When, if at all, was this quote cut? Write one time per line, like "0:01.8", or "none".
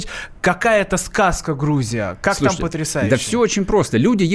none